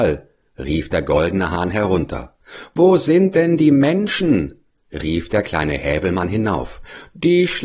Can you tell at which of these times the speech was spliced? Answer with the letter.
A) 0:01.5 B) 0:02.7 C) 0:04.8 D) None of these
D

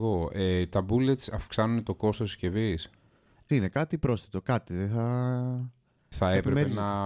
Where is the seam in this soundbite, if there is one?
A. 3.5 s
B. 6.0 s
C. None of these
A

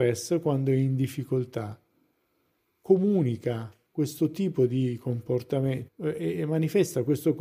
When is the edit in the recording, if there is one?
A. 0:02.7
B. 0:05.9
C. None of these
B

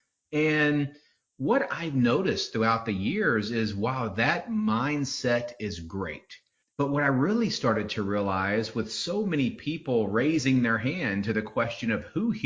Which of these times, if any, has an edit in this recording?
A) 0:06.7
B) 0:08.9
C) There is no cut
A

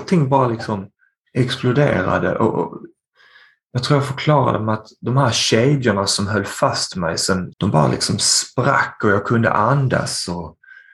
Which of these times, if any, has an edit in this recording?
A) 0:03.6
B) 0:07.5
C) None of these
B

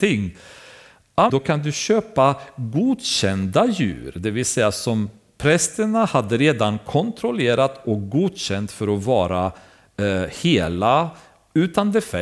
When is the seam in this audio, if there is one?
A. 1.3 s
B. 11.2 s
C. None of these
A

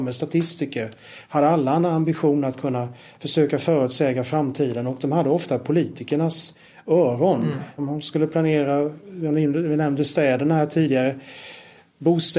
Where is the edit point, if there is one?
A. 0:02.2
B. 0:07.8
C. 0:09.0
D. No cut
B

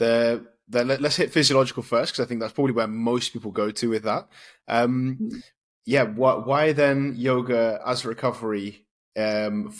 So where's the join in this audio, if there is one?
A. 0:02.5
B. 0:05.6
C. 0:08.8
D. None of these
D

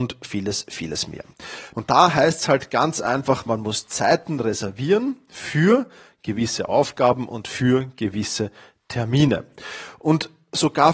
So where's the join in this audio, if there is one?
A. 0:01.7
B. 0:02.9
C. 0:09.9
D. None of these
A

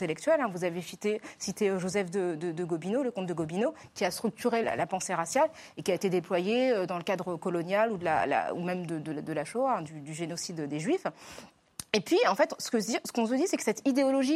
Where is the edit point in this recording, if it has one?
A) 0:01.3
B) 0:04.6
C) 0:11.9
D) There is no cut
B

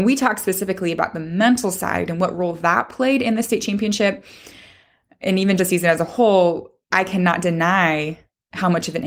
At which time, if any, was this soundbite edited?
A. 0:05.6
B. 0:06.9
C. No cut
A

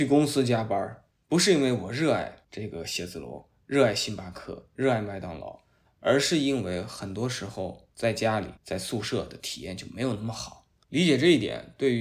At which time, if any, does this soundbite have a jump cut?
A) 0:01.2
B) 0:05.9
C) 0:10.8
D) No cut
C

